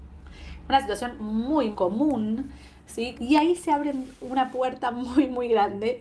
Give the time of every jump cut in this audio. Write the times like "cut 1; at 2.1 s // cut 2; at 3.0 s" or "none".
cut 1; at 1.7 s // cut 2; at 3.1 s